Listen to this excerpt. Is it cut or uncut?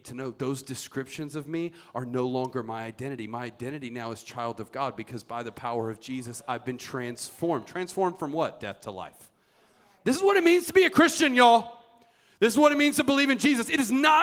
uncut